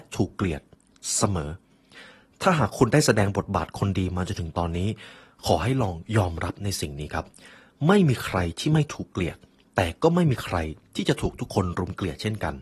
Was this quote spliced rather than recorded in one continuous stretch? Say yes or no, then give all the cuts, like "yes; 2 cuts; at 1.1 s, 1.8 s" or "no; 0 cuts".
no; 0 cuts